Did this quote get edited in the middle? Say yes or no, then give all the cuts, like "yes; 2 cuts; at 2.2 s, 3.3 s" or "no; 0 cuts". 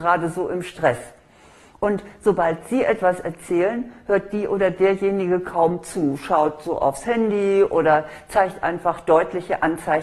no; 0 cuts